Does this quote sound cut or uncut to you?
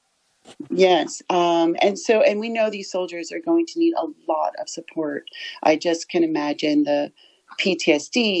uncut